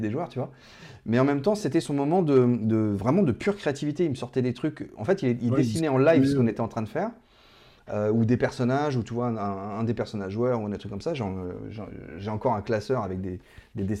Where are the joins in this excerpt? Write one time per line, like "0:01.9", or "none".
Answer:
none